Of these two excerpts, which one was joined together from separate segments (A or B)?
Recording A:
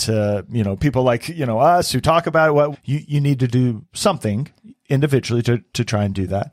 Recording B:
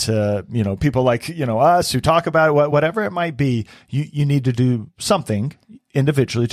A